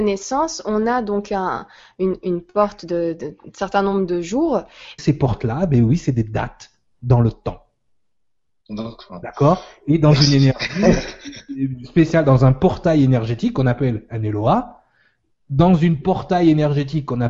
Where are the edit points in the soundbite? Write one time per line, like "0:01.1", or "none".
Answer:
0:05.0